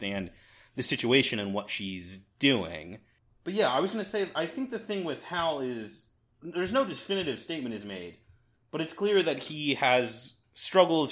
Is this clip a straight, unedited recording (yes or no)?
yes